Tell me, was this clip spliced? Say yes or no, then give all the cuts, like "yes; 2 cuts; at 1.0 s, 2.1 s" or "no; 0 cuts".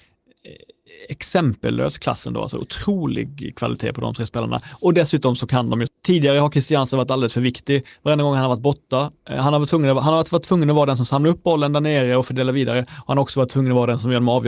yes; 1 cut; at 5.9 s